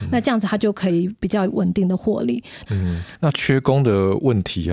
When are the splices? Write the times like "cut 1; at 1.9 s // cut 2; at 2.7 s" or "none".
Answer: cut 1; at 2.7 s